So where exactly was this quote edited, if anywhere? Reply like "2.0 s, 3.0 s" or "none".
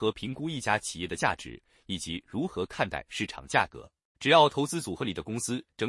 4.1 s

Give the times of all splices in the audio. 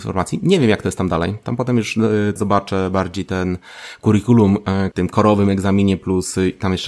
2.4 s, 4.9 s

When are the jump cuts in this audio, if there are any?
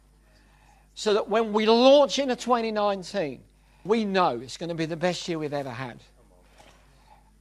3.9 s

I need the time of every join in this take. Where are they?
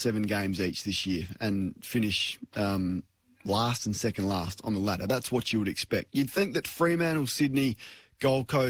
none

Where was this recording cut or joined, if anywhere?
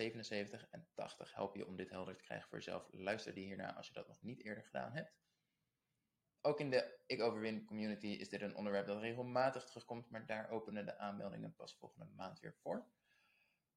none

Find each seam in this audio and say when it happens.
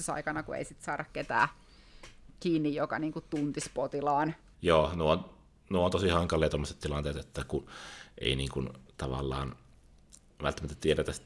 4.5 s

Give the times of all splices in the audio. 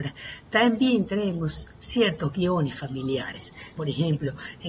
3.7 s

